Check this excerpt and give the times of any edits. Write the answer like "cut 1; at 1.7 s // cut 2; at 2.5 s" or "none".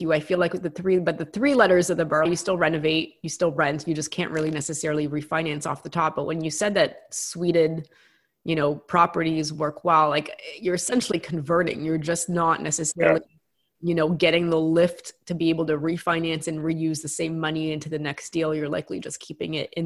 cut 1; at 2.3 s